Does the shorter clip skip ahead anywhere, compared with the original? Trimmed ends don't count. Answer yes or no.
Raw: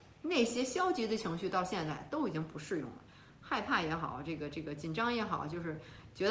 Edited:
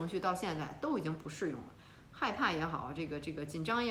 no